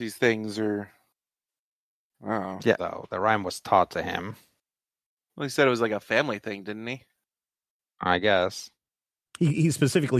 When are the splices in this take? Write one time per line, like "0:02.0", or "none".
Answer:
0:02.8